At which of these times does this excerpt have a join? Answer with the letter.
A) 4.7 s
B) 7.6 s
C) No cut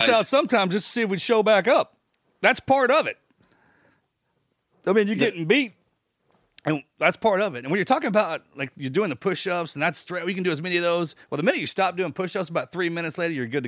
C